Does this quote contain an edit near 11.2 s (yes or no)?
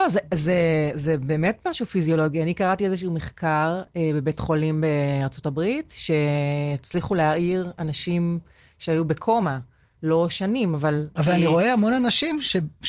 yes